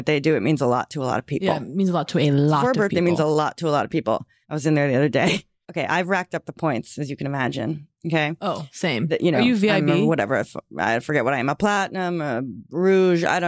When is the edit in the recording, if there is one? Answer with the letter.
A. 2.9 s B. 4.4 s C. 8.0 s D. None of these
B